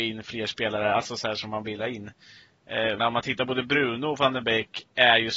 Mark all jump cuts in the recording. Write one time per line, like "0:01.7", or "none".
0:03.0

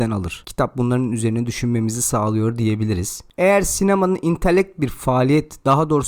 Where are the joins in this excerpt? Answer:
none

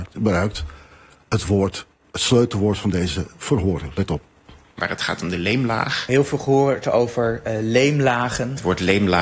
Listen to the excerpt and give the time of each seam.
none

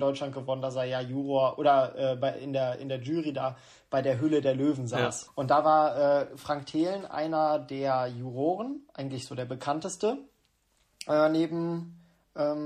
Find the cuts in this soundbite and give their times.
0:05.3

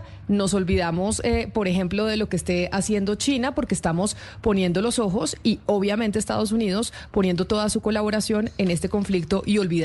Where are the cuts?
none

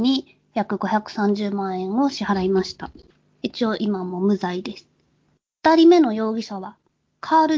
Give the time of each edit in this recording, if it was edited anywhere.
none

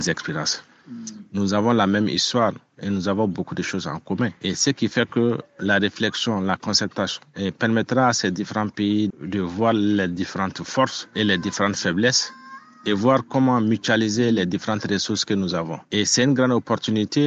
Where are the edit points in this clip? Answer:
0:09.1

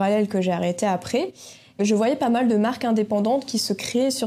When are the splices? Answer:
0:01.7

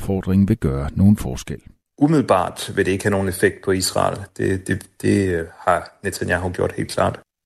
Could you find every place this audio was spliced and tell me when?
0:04.3

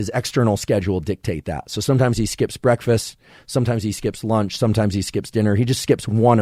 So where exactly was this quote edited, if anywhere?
none

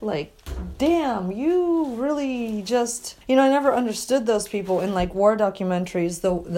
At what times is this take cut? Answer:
0:03.2

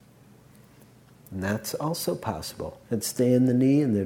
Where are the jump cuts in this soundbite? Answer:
0:02.9

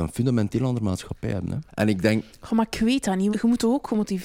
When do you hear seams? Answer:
0:01.7
0:03.3

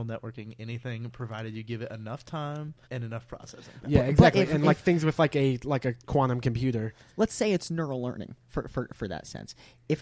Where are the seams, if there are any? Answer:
0:02.8

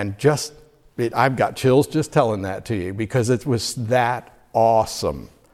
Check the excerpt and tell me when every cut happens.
none

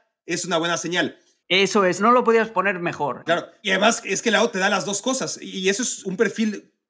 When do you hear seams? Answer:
0:01.4
0:03.3

